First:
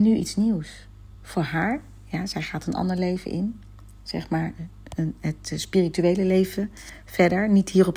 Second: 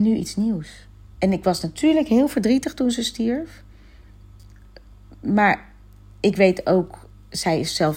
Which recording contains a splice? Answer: second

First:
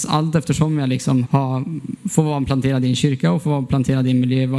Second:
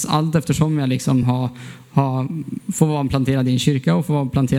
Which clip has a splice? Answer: first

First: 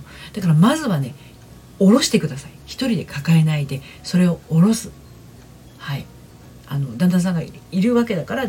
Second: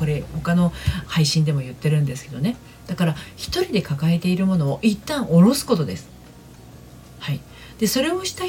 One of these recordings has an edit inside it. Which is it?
second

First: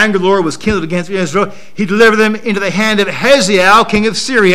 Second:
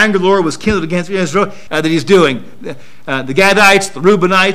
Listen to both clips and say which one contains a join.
second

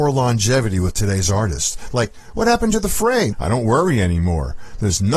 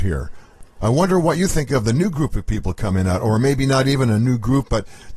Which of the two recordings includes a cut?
first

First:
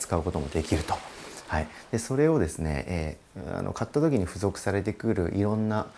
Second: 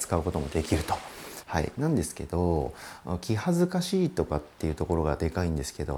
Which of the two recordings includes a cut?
second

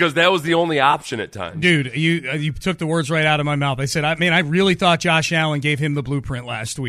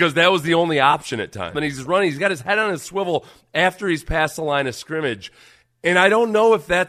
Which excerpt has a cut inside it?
second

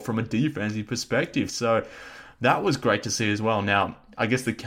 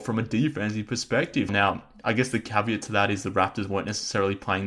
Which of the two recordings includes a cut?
second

